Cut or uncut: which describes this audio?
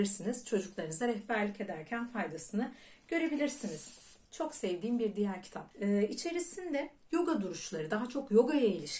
cut